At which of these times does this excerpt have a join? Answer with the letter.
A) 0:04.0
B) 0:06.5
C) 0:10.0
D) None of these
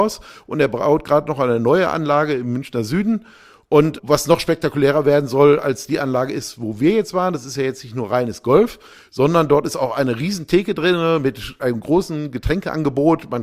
A